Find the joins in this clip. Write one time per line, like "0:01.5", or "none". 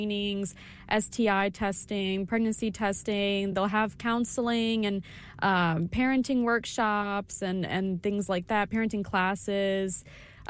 none